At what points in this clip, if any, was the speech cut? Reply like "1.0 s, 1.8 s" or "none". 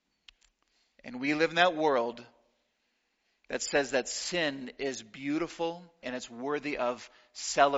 6.0 s